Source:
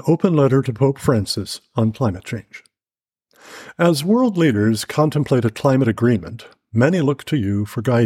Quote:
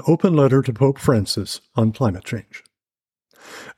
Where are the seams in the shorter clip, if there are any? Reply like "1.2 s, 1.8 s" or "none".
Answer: none